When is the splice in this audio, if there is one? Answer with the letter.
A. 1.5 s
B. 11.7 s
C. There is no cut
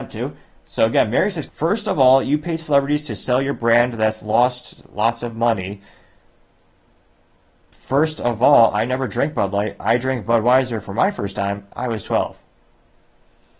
A